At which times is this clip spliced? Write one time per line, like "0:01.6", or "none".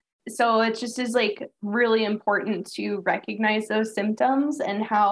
none